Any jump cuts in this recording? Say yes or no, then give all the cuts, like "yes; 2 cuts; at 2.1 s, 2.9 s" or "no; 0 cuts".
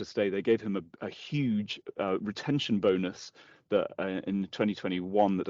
no; 0 cuts